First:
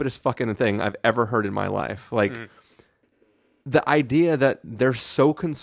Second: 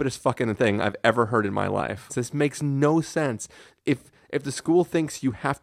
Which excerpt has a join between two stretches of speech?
second; 1 cut; at 2.1 s

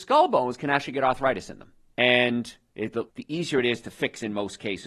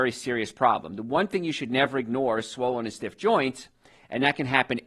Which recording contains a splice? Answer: first; 2 cuts; at 1.9 s, 3.1 s

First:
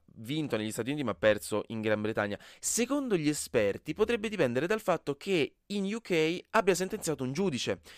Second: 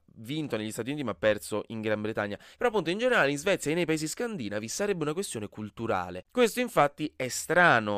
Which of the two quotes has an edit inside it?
second; 2 cuts; at 2.5 s, 6.2 s

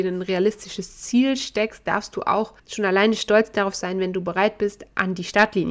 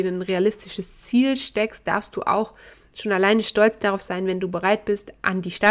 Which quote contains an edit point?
first; 1 cut; at 2.6 s

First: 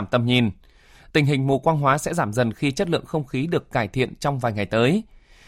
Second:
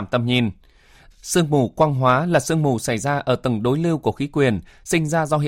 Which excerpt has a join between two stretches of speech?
second; 1 cut; at 1.1 s

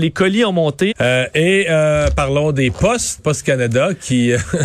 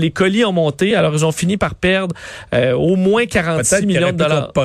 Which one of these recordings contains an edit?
first; 2 cuts; at 0.9 s, 3.2 s

